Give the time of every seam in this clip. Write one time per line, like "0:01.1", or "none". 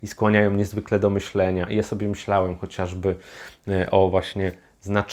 none